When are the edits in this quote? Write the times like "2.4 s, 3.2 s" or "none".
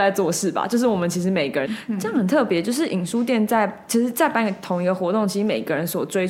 1.6 s